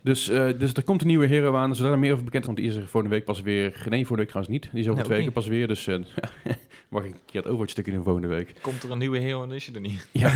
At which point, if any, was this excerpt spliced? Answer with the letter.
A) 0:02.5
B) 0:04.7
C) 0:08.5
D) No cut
A